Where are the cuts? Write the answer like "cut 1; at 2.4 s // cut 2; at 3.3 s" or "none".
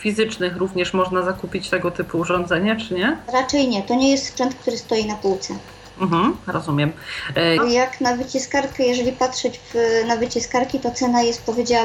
cut 1; at 7.6 s